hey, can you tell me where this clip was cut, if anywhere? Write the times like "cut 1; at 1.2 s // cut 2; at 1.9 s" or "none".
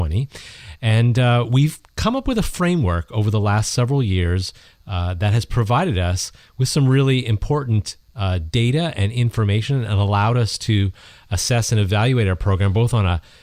none